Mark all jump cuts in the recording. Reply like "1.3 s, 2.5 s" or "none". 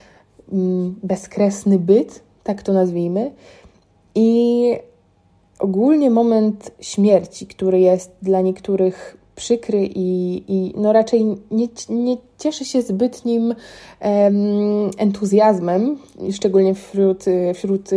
none